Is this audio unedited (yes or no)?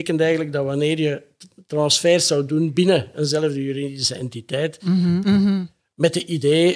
no